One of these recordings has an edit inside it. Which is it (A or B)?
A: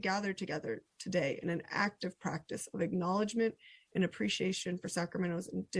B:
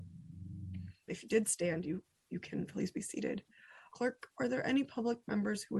B